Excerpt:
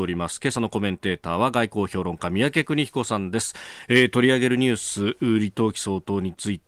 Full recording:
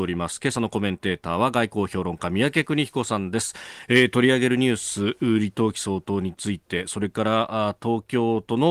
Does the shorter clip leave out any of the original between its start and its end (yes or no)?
no